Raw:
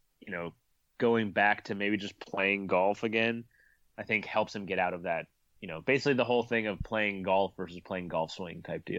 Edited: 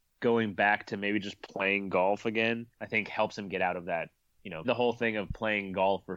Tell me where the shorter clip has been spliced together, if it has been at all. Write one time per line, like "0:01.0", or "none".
0:02.7
0:04.6